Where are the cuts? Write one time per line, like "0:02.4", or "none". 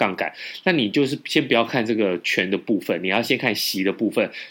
none